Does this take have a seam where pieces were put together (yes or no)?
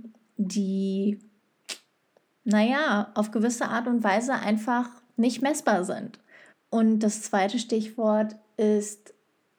yes